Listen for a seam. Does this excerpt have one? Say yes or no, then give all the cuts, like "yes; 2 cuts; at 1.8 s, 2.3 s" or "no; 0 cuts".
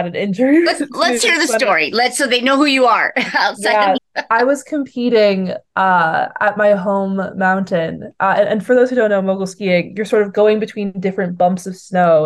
yes; 1 cut; at 4.0 s